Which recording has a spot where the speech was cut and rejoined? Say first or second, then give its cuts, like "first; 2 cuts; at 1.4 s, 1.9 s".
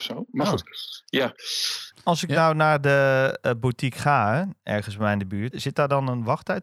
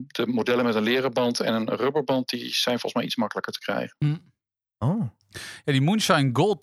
first; 2 cuts; at 1.9 s, 5.5 s